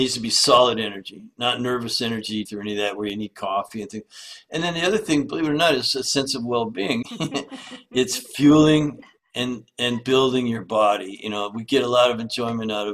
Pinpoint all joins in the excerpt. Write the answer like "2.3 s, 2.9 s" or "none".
2.5 s, 7.0 s

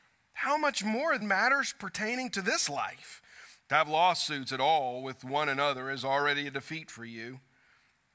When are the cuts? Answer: 1.2 s, 3.6 s

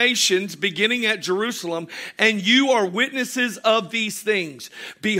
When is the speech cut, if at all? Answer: none

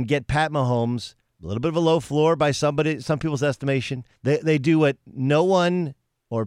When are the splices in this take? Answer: 1.3 s, 4.1 s

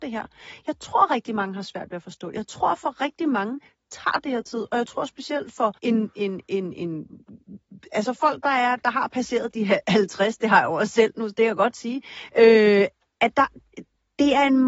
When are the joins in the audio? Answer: 5.8 s

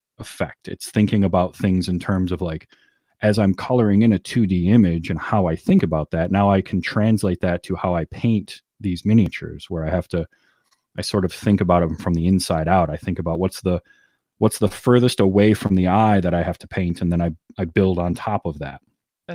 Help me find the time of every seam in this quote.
none

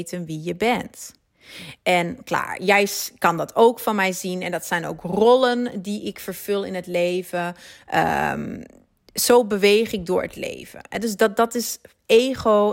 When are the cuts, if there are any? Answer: 1.8 s

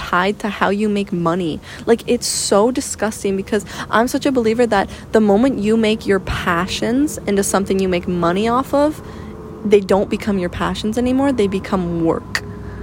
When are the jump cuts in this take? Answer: none

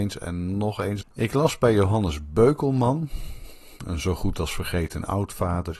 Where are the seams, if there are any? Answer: 1.0 s

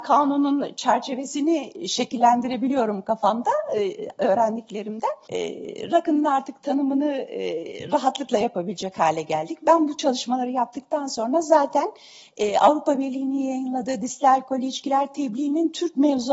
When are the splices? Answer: 5.3 s

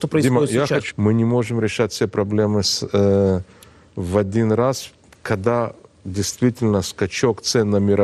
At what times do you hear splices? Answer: 0.9 s

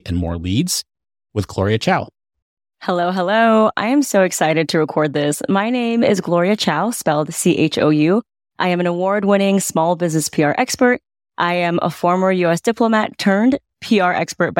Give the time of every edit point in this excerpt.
none

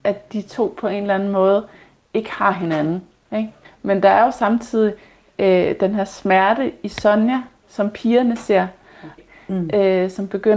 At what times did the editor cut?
3.6 s, 9.2 s

